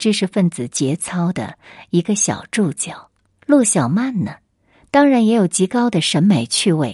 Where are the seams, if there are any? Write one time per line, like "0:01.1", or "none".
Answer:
0:03.4